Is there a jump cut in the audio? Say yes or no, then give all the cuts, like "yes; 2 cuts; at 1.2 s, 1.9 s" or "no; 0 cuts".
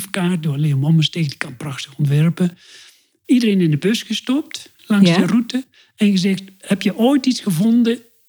yes; 1 cut; at 4.8 s